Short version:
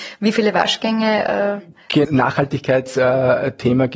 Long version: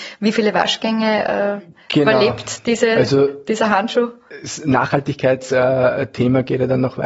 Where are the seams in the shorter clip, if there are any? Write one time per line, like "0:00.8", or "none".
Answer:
0:02.0